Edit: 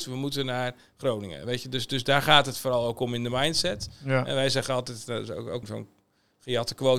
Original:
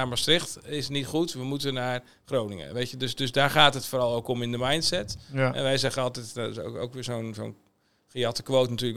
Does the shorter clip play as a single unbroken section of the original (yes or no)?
no